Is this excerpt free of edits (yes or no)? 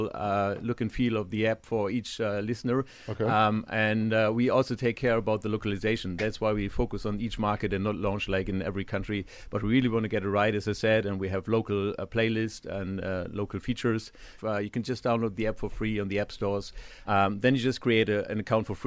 no